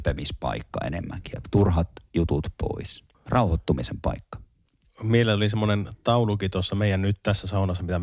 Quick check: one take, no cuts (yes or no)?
no